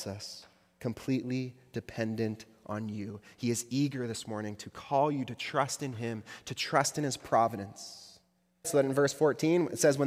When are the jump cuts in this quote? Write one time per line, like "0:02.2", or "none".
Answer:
0:08.6